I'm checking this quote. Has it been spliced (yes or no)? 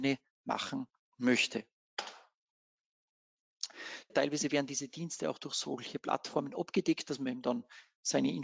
yes